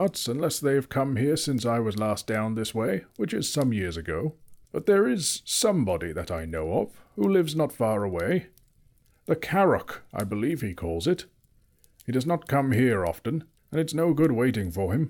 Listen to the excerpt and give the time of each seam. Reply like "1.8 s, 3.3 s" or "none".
4.6 s, 13.6 s